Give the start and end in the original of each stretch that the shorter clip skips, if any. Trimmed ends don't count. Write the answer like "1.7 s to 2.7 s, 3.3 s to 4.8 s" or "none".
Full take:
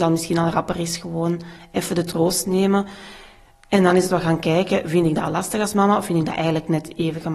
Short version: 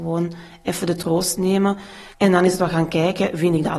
3.2 s to 3.6 s